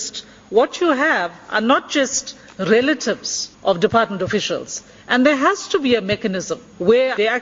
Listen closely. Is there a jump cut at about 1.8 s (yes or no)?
no